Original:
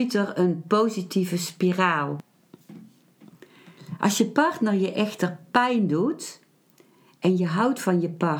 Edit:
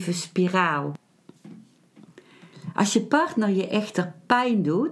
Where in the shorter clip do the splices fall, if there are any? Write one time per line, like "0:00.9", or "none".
none